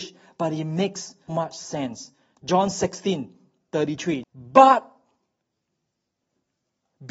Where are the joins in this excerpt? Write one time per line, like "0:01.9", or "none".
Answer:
0:01.3
0:04.2